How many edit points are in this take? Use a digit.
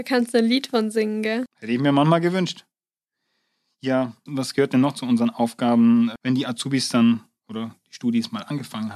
3